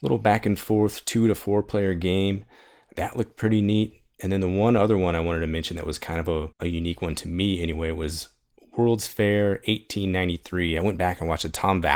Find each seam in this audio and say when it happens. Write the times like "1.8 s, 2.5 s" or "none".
none